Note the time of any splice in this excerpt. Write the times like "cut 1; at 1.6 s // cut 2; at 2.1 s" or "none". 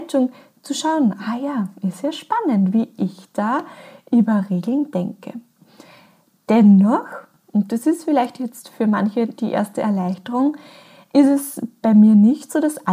none